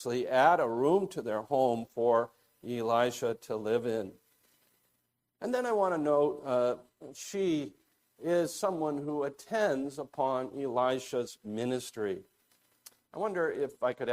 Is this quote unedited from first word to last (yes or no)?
no